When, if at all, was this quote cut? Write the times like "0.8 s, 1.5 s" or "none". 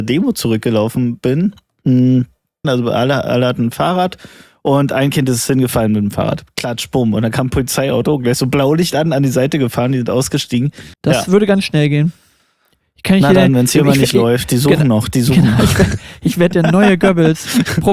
2.6 s, 10.9 s